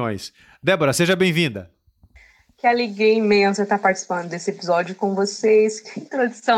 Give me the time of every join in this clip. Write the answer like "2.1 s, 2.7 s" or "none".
none